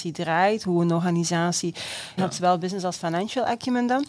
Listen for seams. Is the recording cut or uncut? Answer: cut